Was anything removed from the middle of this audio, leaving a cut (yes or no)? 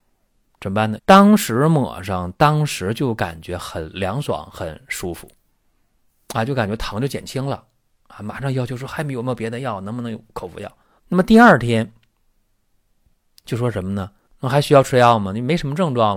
yes